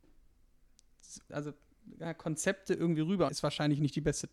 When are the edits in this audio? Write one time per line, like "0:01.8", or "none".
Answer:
0:01.3
0:03.3